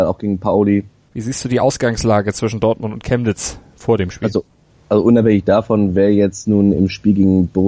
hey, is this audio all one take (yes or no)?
no